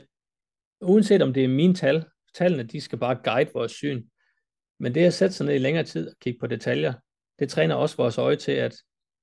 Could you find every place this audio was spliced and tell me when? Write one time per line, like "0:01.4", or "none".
none

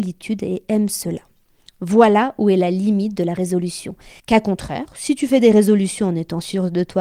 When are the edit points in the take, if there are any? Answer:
0:04.2

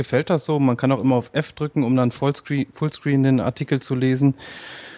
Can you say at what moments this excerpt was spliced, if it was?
none

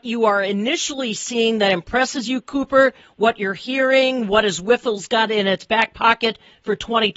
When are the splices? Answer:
none

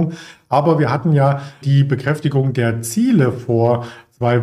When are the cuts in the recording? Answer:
0:01.6

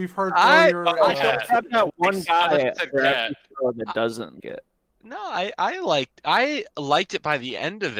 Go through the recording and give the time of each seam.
0:01.1
0:04.4

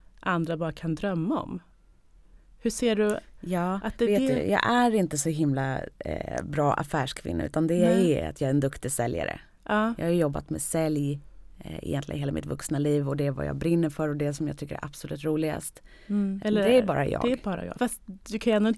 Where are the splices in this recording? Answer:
0:16.4
0:17.8

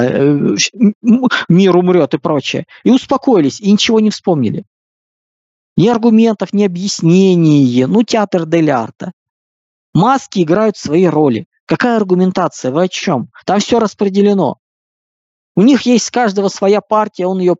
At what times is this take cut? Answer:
none

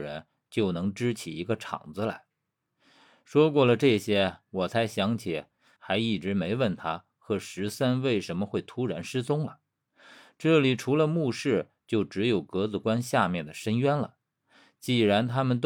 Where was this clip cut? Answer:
0:05.8

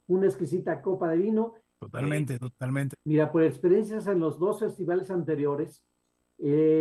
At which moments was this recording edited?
0:01.7
0:02.9

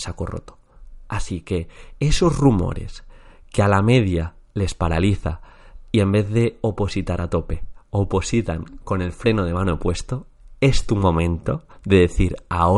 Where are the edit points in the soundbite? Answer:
none

